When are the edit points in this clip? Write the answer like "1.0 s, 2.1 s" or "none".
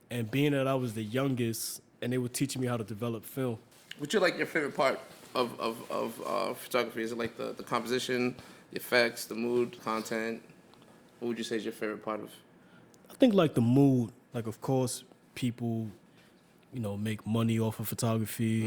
14.3 s